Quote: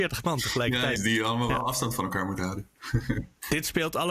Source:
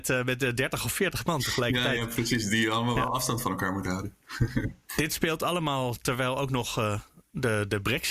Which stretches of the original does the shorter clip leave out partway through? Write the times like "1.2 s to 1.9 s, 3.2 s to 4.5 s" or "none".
2.0 s to 2.4 s

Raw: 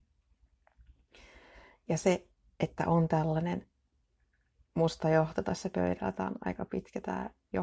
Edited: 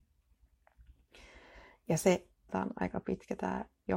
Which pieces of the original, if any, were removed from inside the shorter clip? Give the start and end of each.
2.5 s to 6.1 s

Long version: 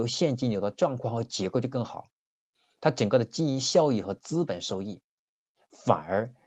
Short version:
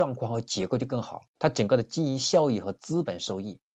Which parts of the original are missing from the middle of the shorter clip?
2.2 s to 2.8 s

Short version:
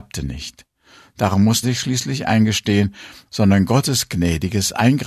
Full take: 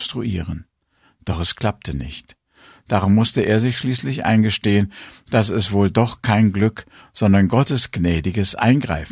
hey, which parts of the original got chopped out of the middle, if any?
3.3 s to 3.6 s, 5.2 s to 7.1 s

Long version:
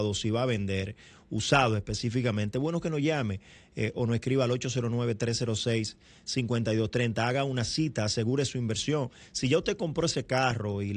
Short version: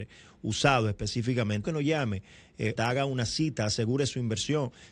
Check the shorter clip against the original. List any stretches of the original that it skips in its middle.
2.5 s to 2.8 s, 3.9 s to 7.1 s

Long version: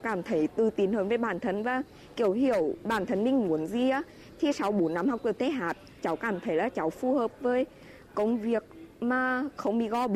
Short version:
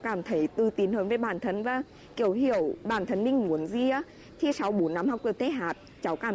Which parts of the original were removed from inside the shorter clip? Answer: none

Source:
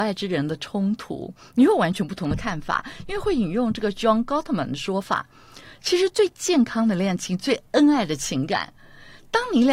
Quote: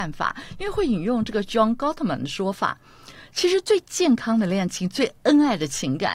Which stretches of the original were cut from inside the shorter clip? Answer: none

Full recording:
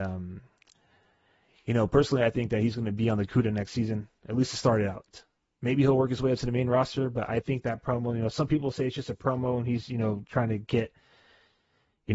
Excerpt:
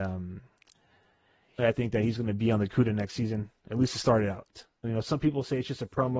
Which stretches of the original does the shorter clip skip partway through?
1.6 s to 2.2 s, 5.4 s to 8.1 s

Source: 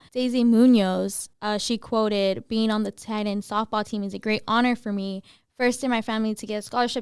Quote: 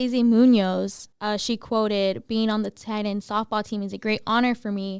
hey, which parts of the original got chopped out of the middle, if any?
none

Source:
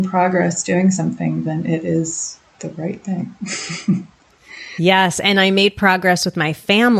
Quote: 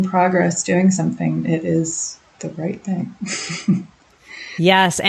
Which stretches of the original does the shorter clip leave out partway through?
1.4 s to 1.6 s

